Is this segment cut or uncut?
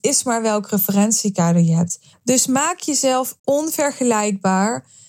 cut